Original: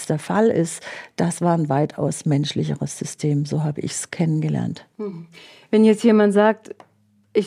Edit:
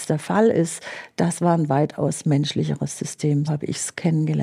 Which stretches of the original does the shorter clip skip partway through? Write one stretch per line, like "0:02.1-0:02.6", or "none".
0:03.5-0:03.6